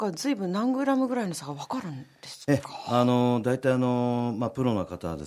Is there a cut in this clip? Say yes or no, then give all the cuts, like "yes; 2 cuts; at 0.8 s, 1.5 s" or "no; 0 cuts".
no; 0 cuts